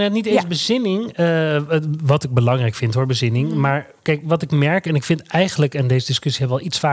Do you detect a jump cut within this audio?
no; 0 cuts

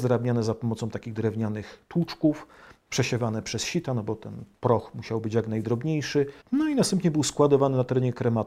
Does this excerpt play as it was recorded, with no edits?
no; 1 cut; at 6.4 s

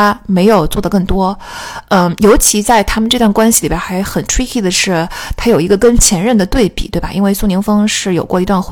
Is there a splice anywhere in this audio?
no; 0 cuts

